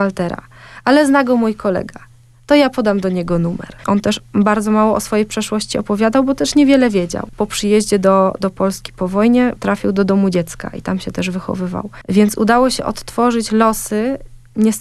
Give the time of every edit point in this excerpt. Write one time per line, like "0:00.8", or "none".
0:03.8